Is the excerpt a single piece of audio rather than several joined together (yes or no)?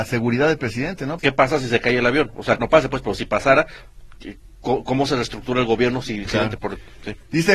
no